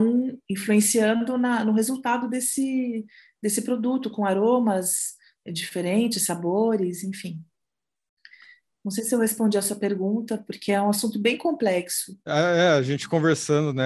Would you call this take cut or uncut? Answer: cut